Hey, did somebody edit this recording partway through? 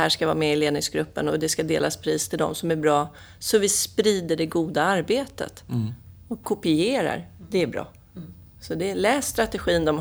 no; 0 cuts

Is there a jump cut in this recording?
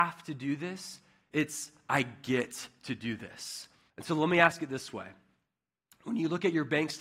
yes; 1 cut; at 3.9 s

